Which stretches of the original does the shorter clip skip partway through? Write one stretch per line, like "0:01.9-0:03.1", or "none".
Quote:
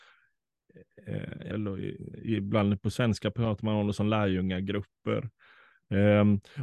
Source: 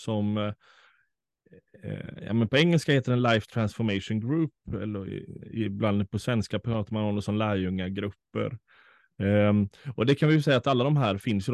0:02.3-0:04.8

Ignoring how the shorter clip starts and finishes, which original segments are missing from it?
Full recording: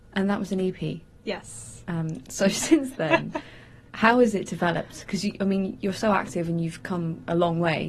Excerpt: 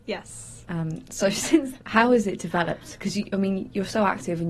0:03.0-0:03.9

